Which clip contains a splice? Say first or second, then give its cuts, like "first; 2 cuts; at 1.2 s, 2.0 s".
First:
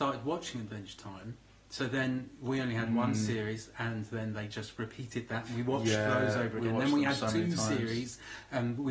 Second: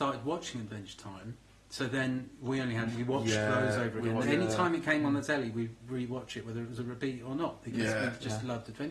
second; 2 cuts; at 2.9 s, 4.2 s